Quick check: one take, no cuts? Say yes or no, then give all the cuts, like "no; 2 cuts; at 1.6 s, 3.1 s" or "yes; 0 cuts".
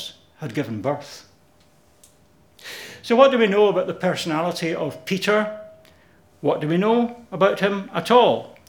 yes; 0 cuts